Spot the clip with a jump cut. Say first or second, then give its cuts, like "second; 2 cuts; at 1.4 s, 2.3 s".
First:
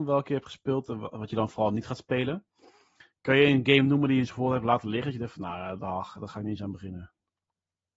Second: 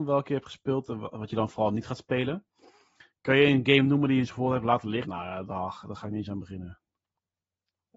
second; 1 cut; at 5.0 s